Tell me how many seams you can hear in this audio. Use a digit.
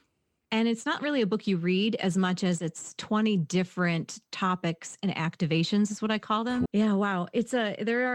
1